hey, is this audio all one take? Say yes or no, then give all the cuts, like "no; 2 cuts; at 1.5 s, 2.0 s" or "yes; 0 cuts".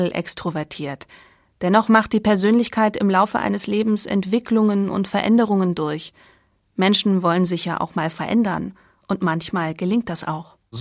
yes; 0 cuts